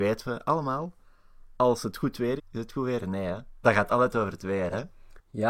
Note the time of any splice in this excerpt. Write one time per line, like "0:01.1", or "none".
0:02.4
0:03.6